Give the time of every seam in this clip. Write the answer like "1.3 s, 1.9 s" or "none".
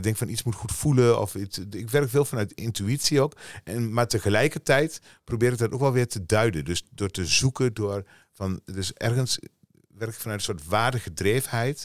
none